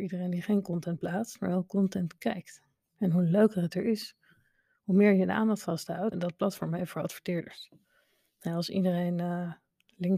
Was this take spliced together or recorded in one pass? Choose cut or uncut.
cut